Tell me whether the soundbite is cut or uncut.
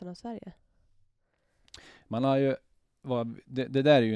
uncut